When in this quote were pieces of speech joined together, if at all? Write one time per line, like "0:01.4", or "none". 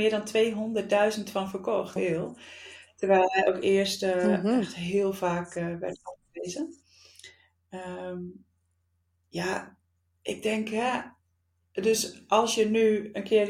0:02.0